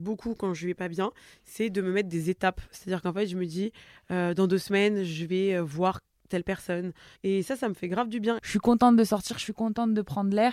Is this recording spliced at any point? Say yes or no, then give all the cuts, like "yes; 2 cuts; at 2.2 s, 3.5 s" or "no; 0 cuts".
yes; 2 cuts; at 7.1 s, 8.4 s